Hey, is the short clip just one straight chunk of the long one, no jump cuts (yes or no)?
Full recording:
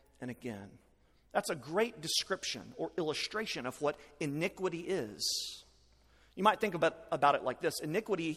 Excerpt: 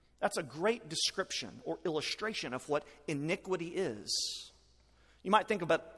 yes